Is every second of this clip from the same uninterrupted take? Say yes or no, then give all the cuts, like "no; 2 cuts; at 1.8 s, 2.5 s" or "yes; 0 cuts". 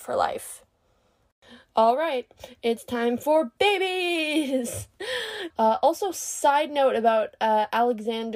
no; 1 cut; at 5.5 s